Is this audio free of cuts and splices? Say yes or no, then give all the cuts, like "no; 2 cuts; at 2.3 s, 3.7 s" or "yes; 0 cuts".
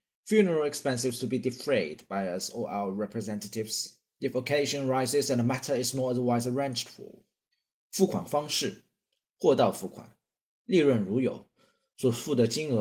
yes; 0 cuts